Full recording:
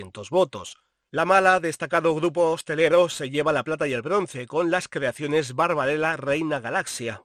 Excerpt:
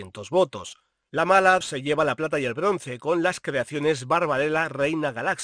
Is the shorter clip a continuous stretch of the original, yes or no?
no